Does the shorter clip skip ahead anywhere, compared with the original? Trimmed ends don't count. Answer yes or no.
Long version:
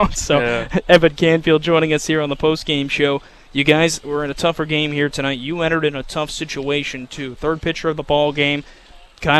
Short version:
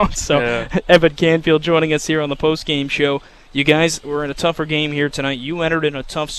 no